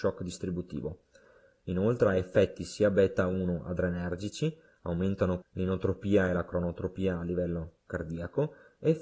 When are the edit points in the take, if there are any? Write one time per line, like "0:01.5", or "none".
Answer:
0:01.6
0:05.4